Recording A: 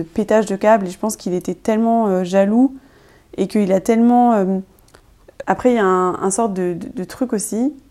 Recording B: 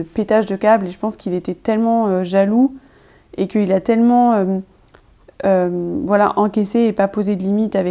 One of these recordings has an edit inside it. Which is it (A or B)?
A